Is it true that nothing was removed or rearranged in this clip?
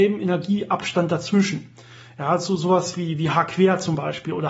yes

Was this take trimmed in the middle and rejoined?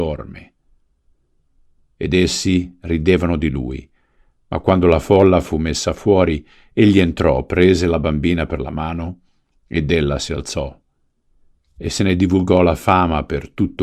no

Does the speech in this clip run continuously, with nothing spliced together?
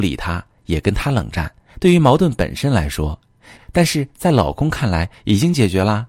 no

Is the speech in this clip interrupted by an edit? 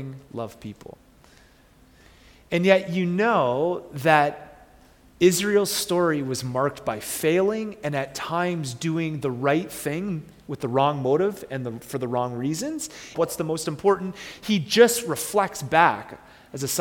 yes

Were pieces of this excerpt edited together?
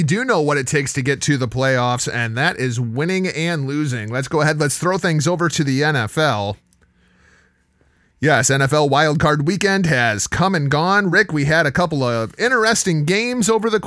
no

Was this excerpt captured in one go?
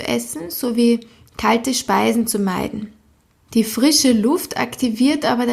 no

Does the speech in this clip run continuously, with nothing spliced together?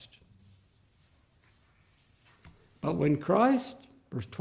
yes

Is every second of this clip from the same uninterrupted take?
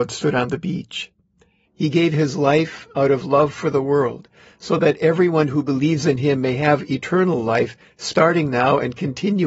no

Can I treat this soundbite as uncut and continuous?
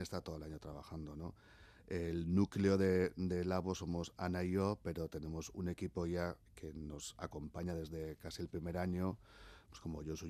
yes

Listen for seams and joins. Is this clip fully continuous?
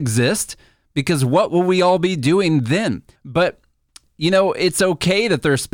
no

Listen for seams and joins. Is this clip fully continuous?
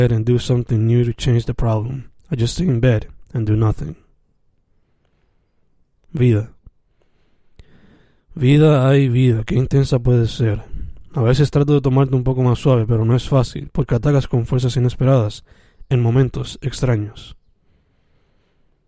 yes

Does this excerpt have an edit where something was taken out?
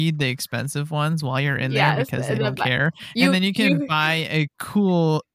no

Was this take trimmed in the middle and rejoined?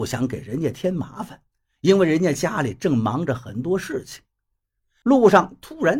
yes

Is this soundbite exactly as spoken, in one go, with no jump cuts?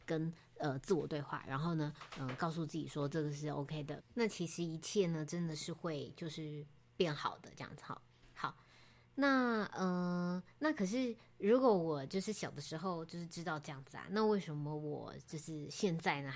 no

